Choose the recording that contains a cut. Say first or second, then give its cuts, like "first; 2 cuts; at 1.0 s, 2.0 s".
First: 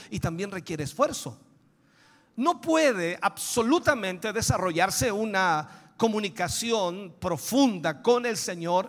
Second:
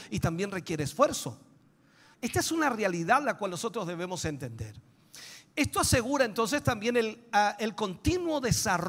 second; 1 cut; at 2.1 s